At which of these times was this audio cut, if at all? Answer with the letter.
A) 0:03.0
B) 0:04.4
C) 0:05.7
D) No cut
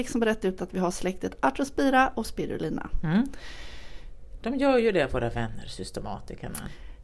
B